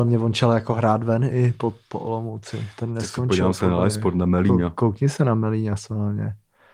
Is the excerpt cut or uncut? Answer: uncut